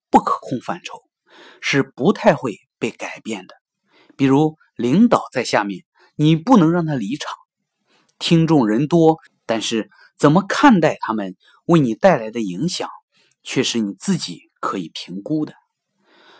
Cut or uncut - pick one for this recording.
cut